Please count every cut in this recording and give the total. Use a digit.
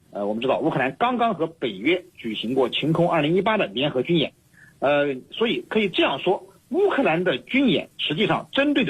0